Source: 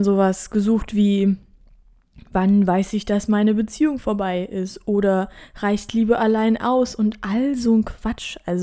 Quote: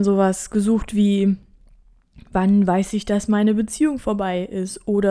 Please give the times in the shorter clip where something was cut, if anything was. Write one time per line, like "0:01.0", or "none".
none